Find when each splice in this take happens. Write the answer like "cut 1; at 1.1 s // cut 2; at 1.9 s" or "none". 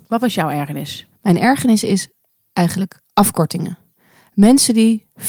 none